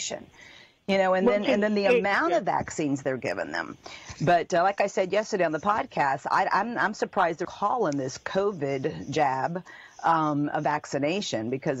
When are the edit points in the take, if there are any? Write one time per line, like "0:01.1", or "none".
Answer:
0:07.4